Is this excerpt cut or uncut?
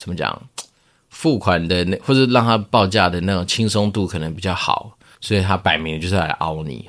cut